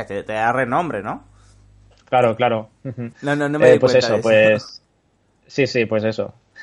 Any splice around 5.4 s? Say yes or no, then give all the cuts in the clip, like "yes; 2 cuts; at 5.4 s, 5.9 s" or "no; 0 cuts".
no; 1 cut; at 3.1 s